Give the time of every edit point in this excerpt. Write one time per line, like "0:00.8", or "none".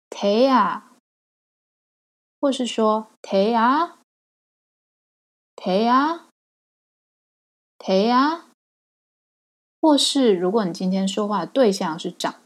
none